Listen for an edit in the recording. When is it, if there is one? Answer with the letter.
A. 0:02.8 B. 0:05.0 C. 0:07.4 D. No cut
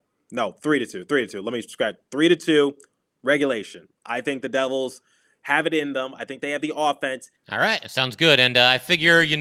C